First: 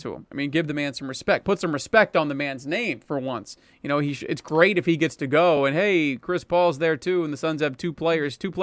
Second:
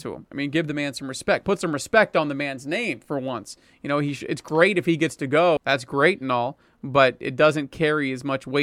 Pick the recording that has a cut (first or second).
second